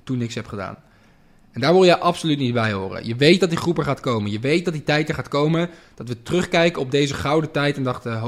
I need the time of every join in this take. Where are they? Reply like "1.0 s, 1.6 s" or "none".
none